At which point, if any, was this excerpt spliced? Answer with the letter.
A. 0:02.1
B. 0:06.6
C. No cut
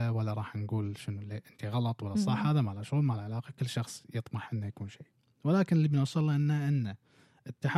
C